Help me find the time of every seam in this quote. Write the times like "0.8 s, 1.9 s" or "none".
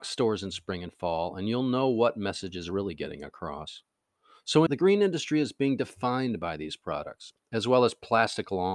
4.7 s